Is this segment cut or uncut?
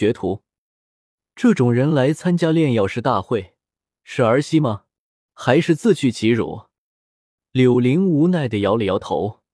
uncut